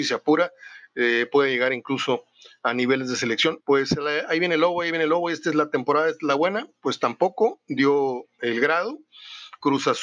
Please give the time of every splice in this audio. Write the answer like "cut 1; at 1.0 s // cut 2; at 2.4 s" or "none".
cut 1; at 3.6 s